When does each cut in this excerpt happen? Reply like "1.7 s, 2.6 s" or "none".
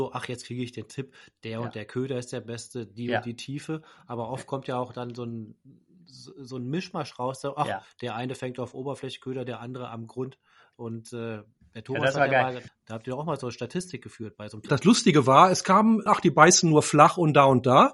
12.7 s, 14.7 s, 16.1 s